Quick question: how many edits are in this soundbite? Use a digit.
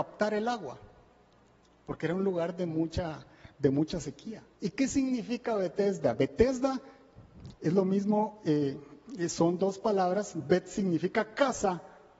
1